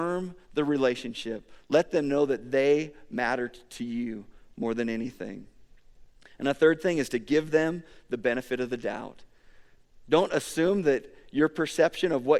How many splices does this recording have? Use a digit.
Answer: 0